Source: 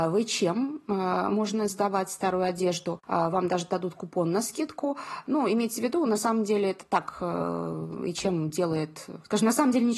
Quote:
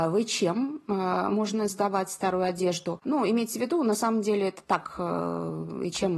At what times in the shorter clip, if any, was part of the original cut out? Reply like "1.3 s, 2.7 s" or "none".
3.0 s